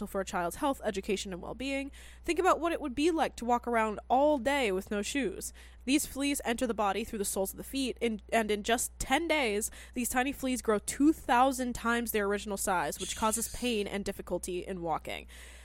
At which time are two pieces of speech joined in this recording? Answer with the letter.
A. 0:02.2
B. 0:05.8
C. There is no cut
B